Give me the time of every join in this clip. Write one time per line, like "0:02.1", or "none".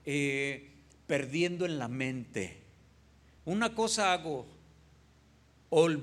0:03.4

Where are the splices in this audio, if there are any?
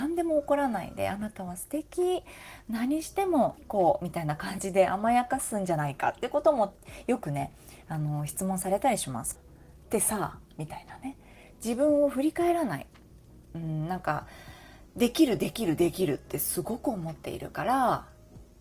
0:03.6
0:09.4

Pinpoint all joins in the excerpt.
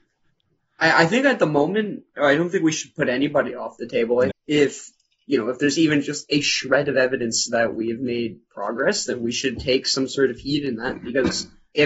0:04.3

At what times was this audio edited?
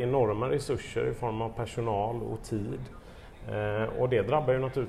none

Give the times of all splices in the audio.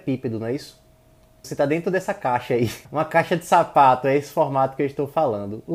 0:01.4
0:02.8

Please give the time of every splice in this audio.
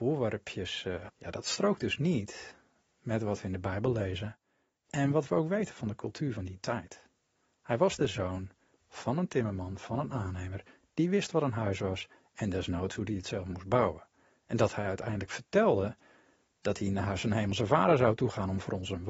0:01.1

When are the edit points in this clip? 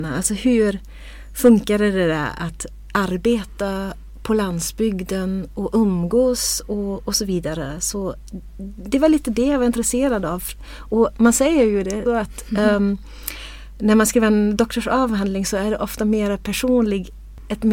0:12.1

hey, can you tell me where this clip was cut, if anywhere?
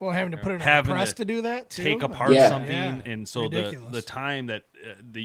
none

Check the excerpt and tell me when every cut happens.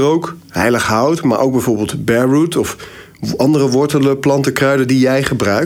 none

